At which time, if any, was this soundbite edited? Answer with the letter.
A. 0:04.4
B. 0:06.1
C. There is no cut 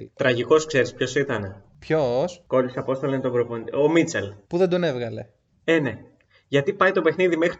A